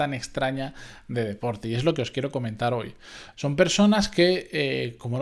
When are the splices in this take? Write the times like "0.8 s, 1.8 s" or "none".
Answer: 3.3 s